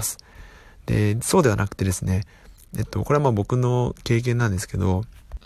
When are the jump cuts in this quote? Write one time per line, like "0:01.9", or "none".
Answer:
none